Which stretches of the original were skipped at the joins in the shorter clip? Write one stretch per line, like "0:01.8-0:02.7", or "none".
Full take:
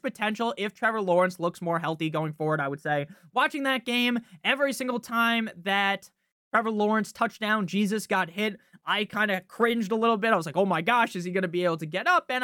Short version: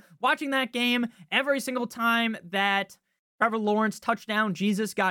none